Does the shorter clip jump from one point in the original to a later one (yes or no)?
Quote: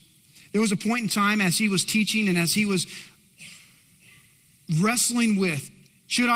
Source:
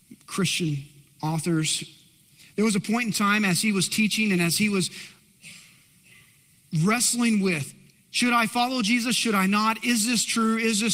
no